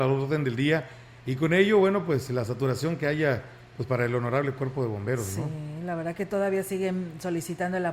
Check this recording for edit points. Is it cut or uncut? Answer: uncut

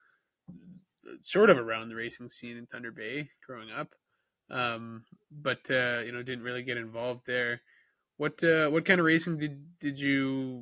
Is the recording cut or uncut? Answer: uncut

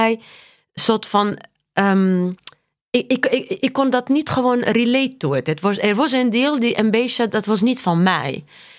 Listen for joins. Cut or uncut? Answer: cut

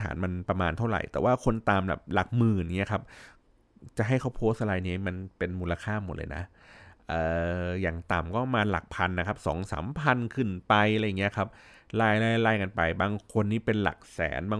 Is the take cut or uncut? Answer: uncut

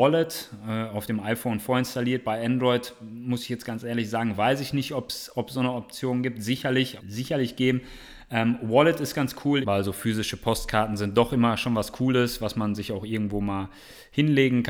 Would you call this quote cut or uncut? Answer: cut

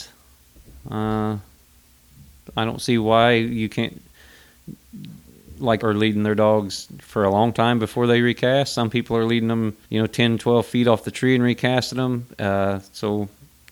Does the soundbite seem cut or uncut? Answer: cut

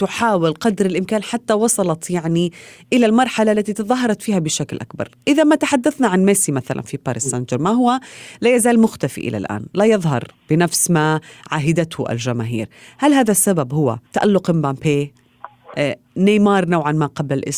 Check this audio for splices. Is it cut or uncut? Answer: cut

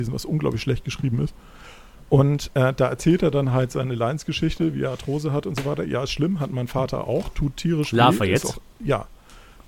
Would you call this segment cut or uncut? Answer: uncut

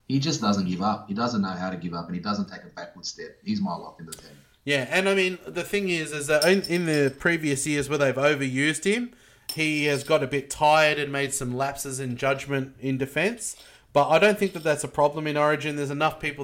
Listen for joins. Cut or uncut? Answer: uncut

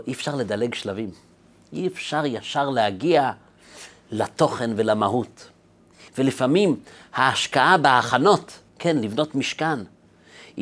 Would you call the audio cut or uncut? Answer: cut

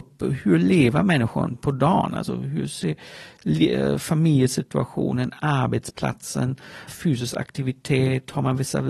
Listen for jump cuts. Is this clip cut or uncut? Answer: cut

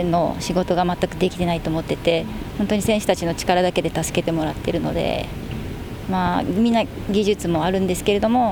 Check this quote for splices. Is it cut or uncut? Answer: uncut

